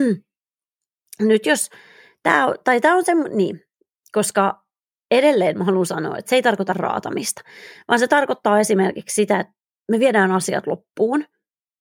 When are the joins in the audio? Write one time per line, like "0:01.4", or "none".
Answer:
none